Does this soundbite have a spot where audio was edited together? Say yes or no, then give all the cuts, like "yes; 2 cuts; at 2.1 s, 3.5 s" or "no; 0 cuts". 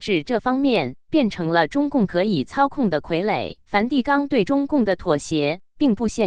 yes; 2 cuts; at 1.0 s, 3.6 s